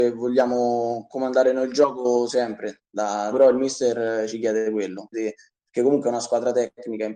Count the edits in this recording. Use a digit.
2